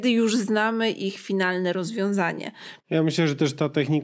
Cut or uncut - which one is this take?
cut